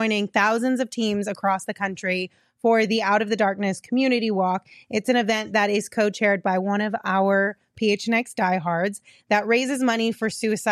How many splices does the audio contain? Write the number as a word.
zero